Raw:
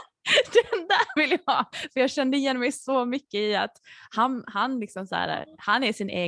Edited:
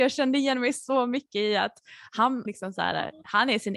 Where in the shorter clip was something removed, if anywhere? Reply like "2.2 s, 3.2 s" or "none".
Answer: 2.5 s